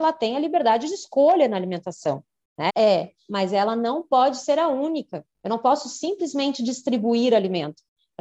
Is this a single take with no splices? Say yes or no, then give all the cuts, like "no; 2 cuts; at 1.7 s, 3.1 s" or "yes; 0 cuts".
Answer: no; 1 cut; at 2.7 s